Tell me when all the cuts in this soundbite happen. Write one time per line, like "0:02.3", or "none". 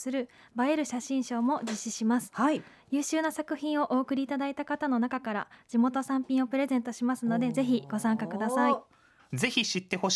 0:09.2